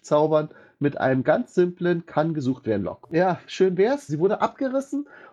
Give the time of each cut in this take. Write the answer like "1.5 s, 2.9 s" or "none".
3.0 s, 4.1 s